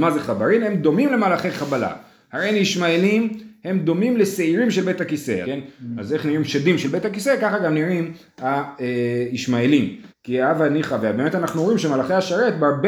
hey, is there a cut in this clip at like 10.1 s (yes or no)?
yes